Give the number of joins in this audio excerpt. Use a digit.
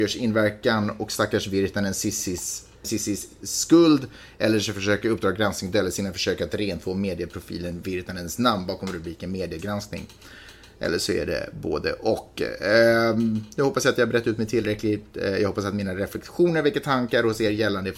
1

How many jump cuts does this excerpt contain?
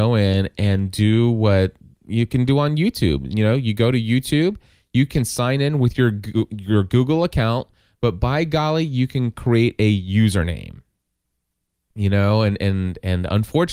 0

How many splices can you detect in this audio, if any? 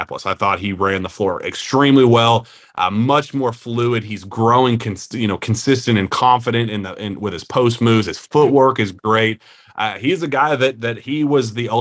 0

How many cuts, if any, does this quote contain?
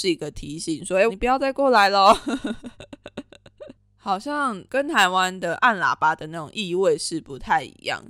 1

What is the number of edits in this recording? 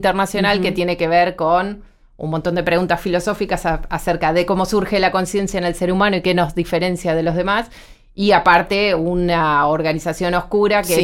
0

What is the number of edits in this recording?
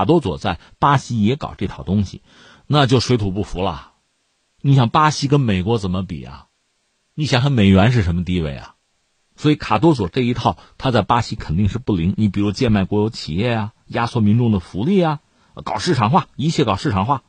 0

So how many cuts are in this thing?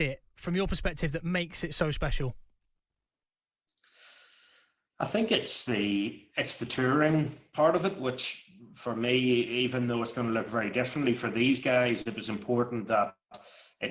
0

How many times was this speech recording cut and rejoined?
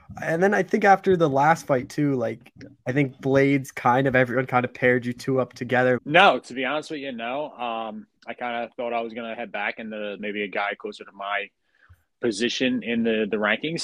3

